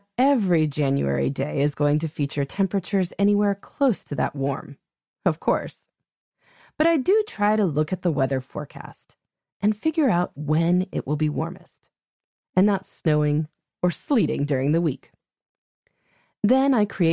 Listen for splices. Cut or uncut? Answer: uncut